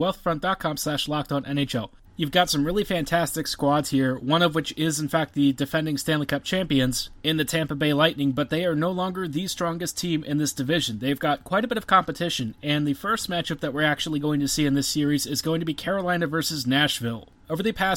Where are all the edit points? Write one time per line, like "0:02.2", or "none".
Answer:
0:02.0